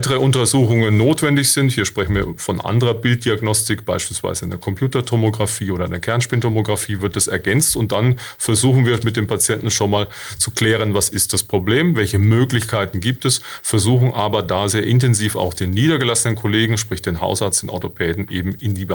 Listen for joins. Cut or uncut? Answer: uncut